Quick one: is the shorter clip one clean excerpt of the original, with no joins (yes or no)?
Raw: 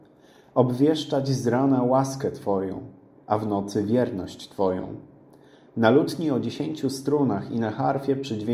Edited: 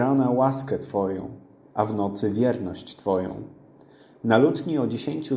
yes